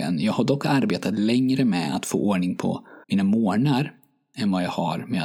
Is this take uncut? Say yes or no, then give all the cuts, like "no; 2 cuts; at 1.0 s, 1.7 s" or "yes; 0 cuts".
no; 1 cut; at 3.0 s